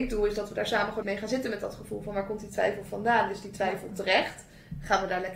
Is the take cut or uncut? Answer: cut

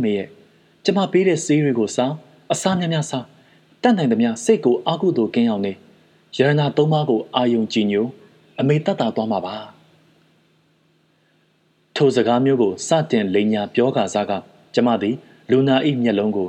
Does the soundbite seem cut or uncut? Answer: uncut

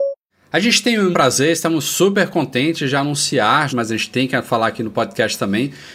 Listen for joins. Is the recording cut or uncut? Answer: cut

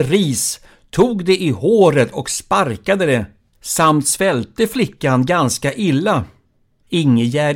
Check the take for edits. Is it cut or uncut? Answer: uncut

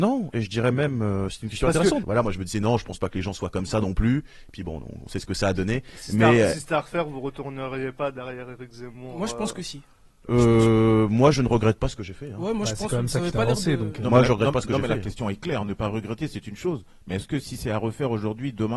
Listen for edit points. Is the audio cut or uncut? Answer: cut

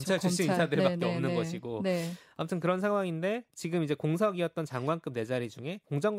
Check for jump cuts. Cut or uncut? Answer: uncut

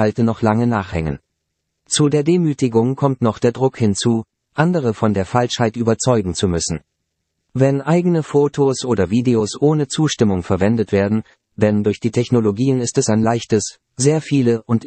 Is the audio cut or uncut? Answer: cut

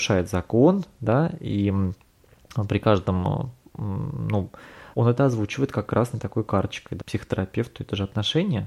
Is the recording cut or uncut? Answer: cut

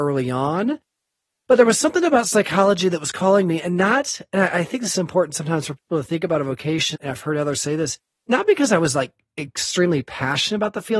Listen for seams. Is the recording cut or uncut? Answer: cut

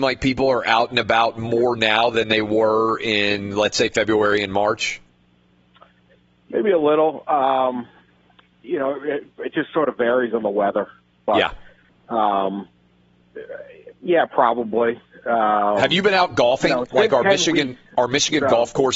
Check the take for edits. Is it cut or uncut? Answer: uncut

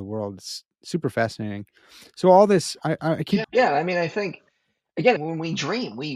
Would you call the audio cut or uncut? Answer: cut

